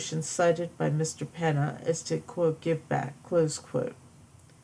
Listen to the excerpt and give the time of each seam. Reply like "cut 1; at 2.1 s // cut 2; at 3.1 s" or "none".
none